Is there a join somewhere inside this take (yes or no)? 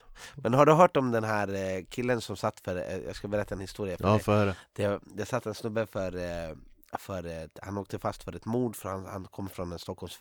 no